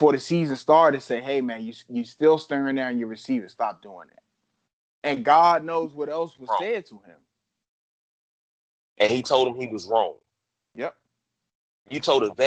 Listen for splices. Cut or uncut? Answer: uncut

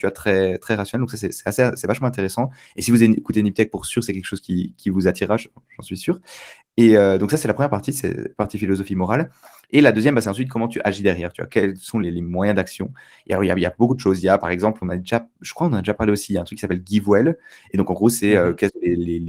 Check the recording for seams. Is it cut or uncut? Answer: uncut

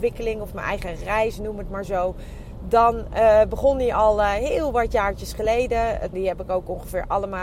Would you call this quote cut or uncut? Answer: cut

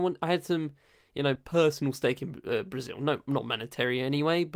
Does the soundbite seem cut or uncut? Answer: uncut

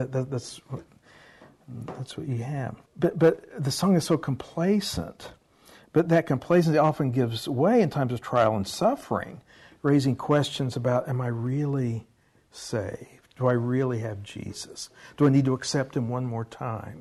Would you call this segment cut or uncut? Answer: cut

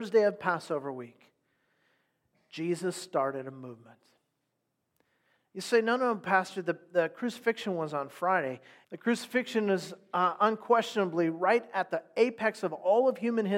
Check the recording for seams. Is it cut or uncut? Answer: cut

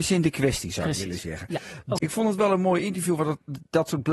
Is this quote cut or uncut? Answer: cut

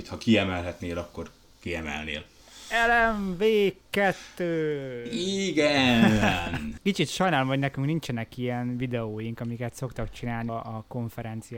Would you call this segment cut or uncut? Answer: cut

